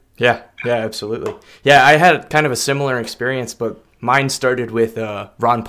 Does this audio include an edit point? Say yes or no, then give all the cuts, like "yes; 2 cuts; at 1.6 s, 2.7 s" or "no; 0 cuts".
no; 0 cuts